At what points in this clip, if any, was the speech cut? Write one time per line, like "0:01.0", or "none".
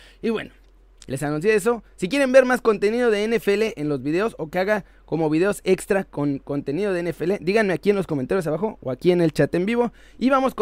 0:01.0